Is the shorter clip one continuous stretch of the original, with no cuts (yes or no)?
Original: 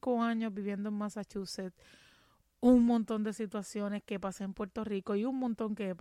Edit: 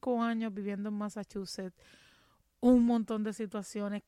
yes